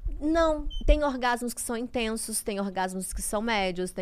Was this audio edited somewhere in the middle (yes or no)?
no